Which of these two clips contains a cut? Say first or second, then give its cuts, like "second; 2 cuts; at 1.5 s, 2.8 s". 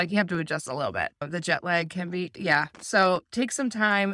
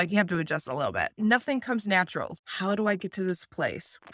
second; 2 cuts; at 1.2 s, 2.4 s